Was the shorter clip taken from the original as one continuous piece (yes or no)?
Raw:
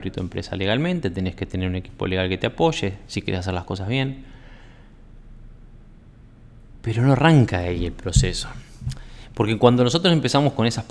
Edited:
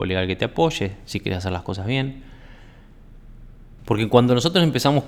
no